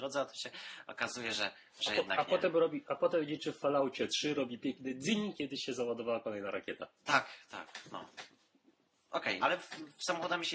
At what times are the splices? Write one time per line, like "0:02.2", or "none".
0:09.4